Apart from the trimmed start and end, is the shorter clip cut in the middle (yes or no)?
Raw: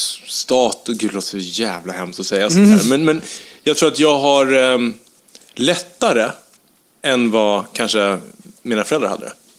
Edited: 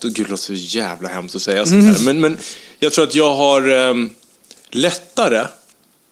no